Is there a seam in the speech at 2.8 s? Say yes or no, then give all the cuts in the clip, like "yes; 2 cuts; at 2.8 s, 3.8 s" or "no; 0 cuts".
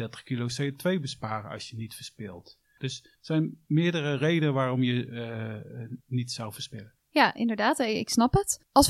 yes; 1 cut; at 2.8 s